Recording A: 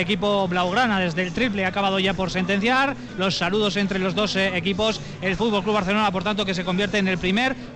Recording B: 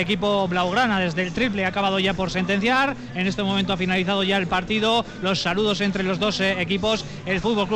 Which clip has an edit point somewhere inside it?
A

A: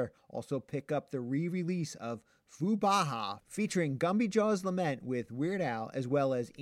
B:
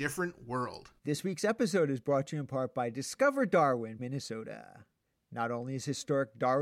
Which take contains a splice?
B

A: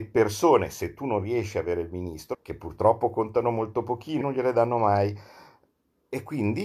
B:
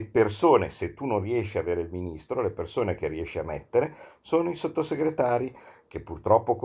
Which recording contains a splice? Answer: A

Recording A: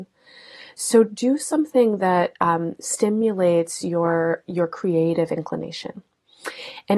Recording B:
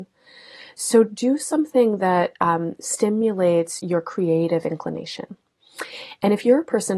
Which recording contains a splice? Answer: B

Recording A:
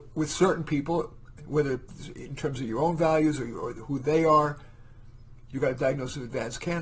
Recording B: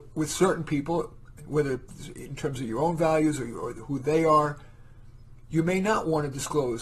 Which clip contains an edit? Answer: A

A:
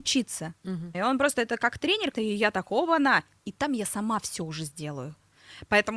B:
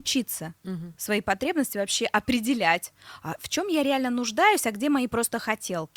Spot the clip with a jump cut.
A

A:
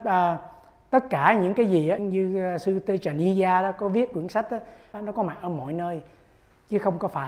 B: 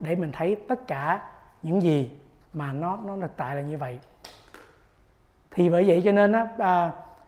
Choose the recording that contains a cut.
A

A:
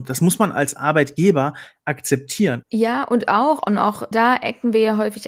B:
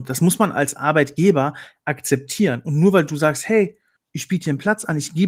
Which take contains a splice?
A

